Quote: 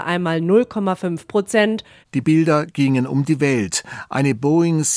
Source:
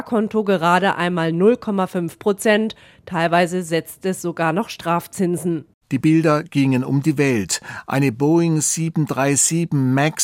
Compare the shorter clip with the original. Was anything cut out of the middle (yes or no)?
yes